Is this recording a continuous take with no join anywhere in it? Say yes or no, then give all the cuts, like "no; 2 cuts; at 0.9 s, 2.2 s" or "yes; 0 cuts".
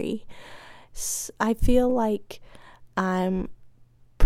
yes; 0 cuts